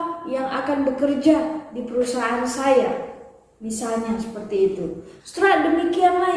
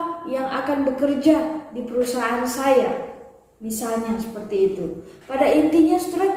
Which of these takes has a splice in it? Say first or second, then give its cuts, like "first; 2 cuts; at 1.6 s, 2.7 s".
first; 1 cut; at 5.2 s